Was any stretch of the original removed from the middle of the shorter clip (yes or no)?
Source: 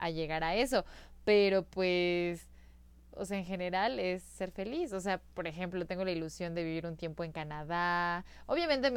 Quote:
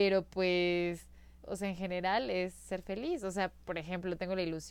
yes